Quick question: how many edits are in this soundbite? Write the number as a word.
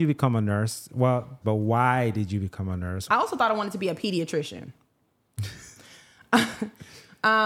two